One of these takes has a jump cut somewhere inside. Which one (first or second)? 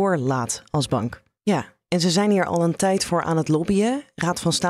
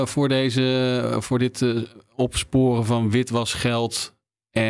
first